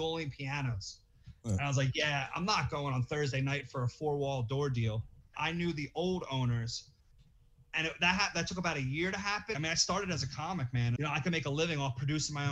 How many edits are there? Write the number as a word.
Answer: three